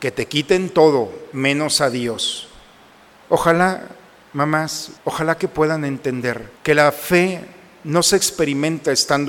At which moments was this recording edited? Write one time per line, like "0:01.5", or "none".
0:03.2
0:05.0
0:06.6